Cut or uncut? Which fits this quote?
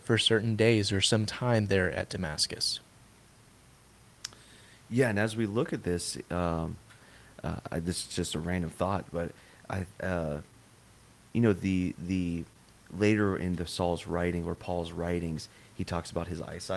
uncut